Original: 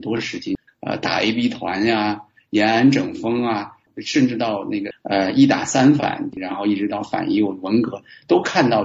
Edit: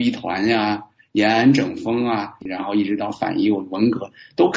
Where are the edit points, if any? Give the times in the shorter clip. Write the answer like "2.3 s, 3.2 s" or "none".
2.4 s